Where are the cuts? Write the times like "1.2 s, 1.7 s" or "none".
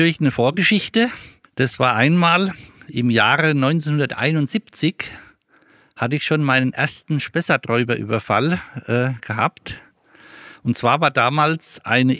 1.4 s